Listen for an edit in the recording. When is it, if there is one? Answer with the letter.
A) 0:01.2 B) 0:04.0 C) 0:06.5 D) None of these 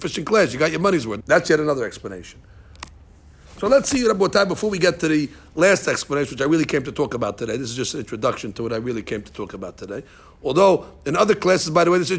A